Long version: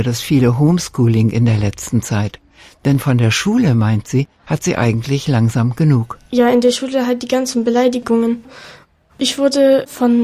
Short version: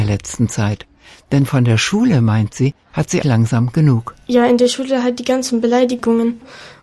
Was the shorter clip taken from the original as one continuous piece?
no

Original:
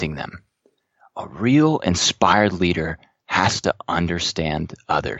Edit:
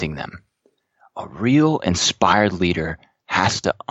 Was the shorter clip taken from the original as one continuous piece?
yes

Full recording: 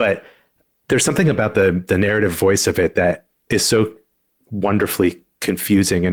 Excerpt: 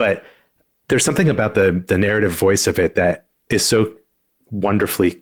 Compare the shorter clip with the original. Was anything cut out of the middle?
no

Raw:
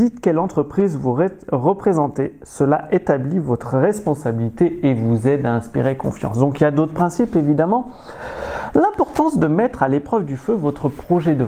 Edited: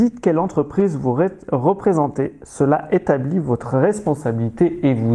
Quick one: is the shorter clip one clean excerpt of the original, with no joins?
yes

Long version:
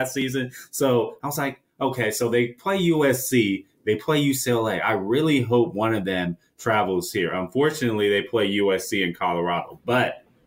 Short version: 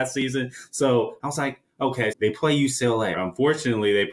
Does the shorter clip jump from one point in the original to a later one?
yes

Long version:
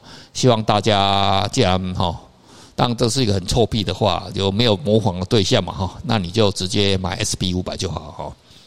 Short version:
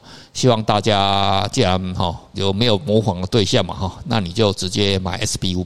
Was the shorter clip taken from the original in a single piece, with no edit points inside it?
no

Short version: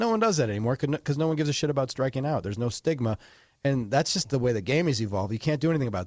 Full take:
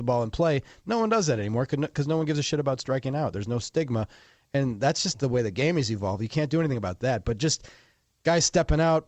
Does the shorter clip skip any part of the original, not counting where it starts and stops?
no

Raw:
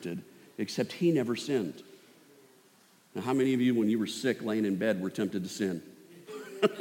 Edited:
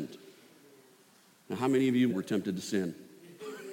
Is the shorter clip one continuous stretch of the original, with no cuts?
no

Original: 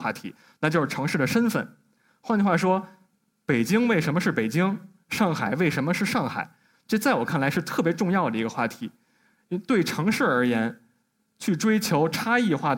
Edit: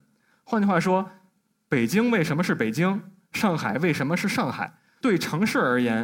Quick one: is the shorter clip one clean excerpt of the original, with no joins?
no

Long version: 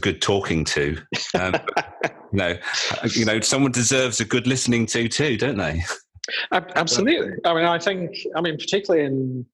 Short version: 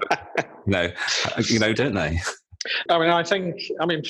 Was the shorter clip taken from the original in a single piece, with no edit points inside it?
no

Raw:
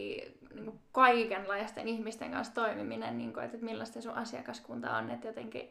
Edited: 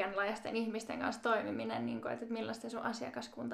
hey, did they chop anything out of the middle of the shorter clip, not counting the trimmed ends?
no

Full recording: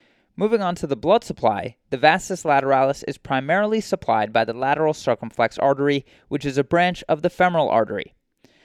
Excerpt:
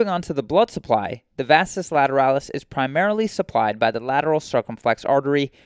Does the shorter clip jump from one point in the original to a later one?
no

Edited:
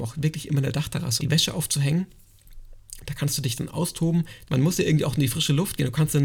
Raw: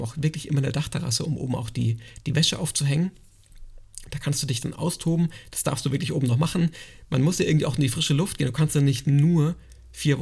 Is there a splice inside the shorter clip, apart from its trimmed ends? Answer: yes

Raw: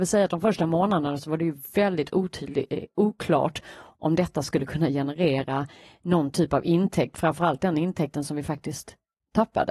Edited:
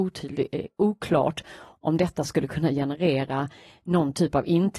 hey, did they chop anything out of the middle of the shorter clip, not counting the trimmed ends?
no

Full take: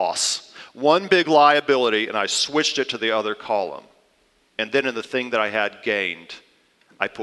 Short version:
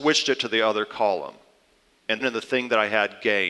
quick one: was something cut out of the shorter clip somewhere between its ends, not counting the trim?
yes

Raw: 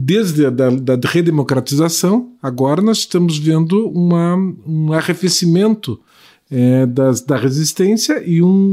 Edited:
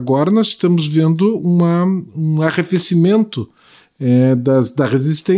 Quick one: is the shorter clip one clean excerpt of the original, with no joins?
yes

